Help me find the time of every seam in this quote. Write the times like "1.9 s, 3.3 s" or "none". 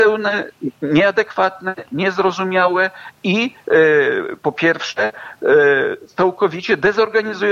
none